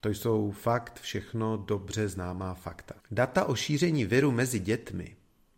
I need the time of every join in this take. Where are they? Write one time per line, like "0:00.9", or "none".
0:03.0